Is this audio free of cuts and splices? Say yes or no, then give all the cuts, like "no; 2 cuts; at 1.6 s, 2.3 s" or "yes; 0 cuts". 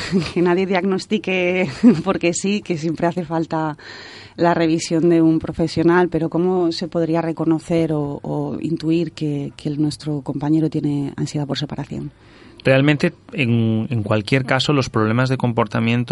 yes; 0 cuts